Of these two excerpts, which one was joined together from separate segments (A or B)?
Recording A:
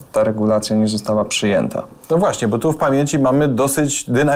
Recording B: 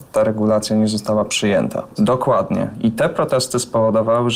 B